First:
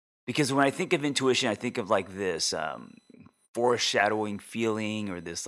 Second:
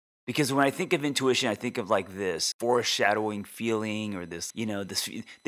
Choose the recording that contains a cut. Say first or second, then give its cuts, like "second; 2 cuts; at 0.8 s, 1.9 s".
second; 2 cuts; at 2.5 s, 4.5 s